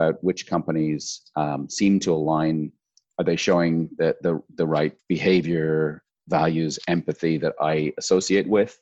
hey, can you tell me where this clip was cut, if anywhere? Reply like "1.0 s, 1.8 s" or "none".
5.0 s